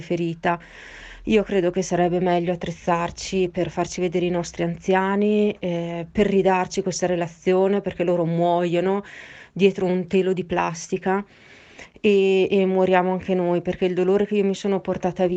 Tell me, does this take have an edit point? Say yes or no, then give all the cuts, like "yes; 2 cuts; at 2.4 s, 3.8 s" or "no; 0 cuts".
no; 0 cuts